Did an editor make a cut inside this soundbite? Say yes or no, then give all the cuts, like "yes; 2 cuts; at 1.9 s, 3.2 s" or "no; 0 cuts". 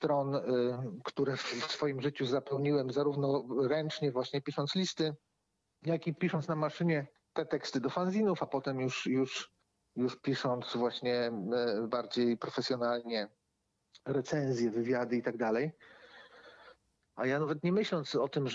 yes; 1 cut; at 17.0 s